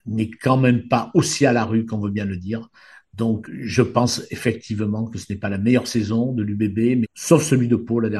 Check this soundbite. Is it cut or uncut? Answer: cut